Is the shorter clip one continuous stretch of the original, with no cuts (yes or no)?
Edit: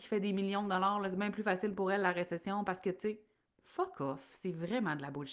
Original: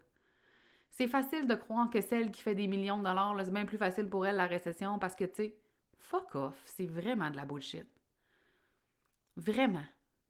yes